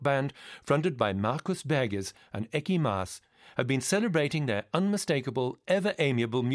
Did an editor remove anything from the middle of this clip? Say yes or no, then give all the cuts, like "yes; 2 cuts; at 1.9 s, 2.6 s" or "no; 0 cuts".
no; 0 cuts